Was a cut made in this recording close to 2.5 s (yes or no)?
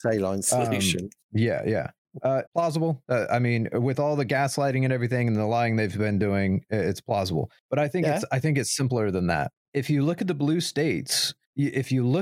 yes